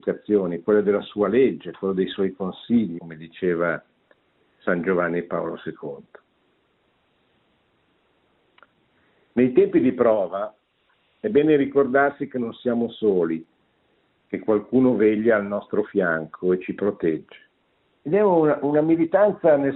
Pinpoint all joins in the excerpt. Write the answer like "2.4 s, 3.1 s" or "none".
3.0 s, 18.0 s